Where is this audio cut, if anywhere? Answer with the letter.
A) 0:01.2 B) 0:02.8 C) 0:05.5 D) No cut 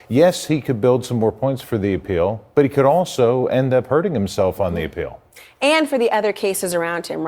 D